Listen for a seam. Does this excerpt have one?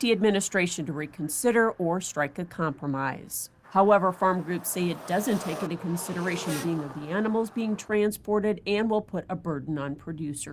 yes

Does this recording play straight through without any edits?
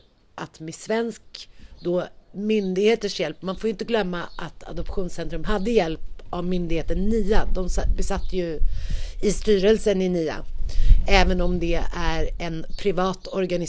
yes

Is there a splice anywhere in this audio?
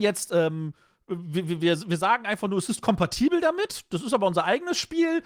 no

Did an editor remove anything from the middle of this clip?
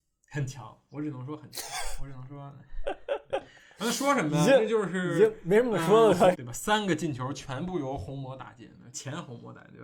yes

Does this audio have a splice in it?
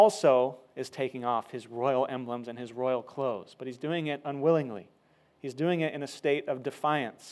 no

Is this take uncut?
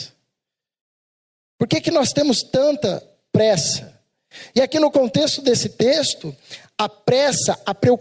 yes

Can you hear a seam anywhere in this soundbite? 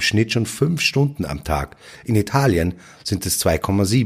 no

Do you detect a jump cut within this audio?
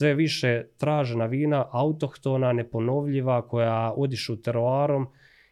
no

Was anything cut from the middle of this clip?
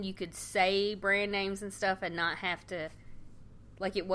no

